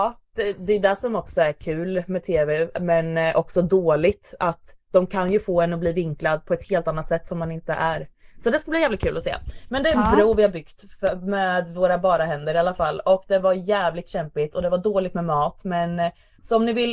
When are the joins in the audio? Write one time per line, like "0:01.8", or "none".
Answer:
none